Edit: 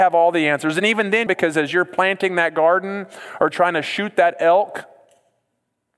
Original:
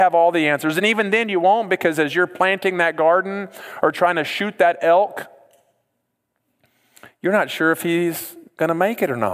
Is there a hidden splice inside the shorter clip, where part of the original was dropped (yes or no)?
yes